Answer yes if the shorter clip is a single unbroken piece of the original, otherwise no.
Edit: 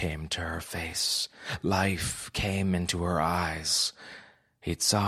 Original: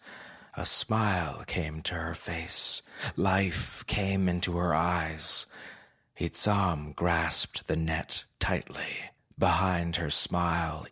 yes